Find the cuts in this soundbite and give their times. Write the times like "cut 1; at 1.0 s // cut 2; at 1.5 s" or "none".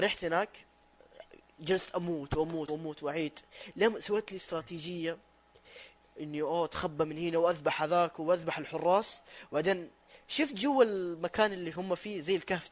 cut 1; at 2.7 s

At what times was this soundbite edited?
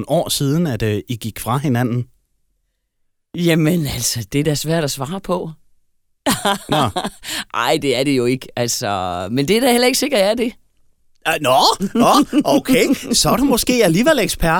none

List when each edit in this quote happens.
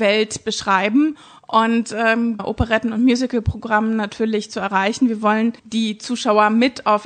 cut 1; at 2.4 s // cut 2; at 5.6 s

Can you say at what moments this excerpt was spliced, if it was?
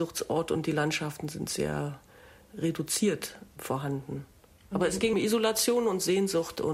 cut 1; at 5.1 s

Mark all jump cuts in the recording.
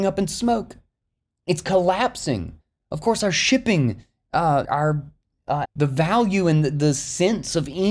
cut 1; at 4.7 s // cut 2; at 5.7 s

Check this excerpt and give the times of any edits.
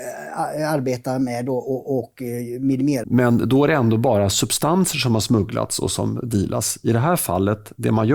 cut 1; at 3.0 s

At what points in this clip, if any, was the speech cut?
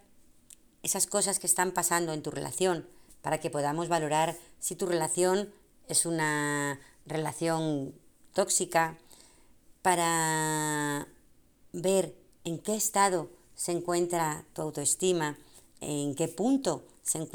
none

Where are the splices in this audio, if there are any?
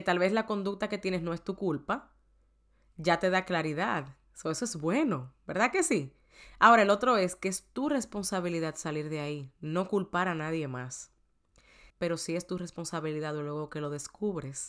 cut 1; at 11.9 s

